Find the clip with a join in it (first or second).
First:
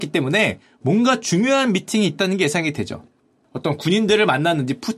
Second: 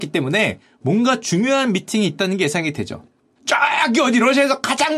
second